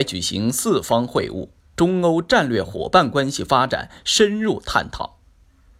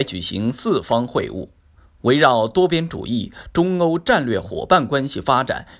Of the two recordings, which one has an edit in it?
first; 1 cut; at 1.7 s

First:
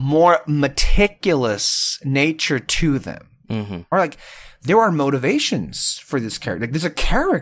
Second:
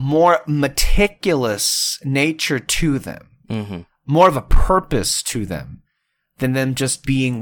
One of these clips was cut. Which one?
first; 1 cut; at 3.9 s

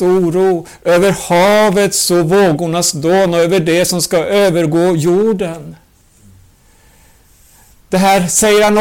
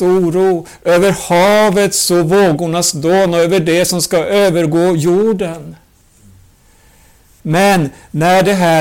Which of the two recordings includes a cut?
second; 1 cut; at 7.4 s

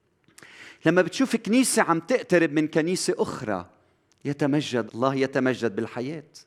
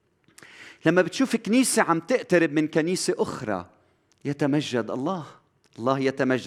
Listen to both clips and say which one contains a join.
first; 1 cut; at 4.9 s

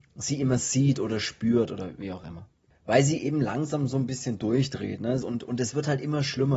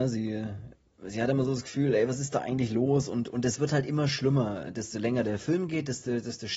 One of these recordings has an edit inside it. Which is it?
first; 1 cut; at 5.2 s

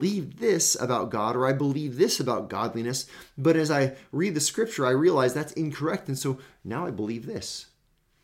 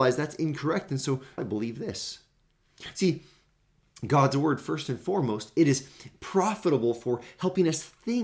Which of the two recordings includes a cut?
second; 1 cut; at 1.4 s

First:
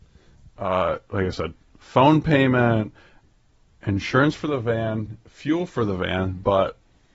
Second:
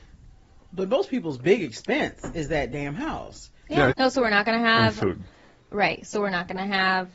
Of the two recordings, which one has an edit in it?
second; 1 cut; at 3.9 s

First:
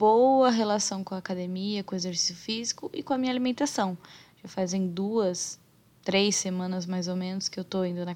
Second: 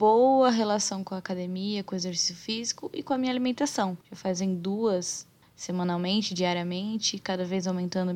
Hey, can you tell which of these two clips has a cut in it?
second; 2 cuts; at 4.0 s, 5.4 s

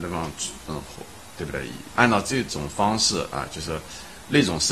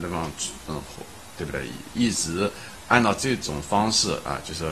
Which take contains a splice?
first; 1 cut; at 1.9 s

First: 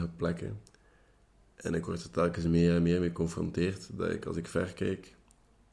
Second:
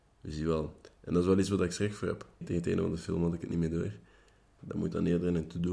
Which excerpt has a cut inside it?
second; 2 cuts; at 2.4 s, 4.6 s

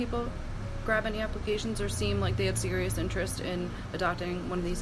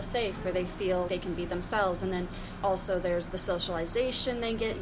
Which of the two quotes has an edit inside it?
second; 2 cuts; at 1.1 s, 2.6 s

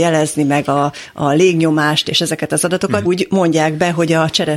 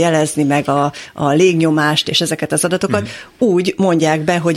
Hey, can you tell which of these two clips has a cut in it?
first; 1 cut; at 3.0 s

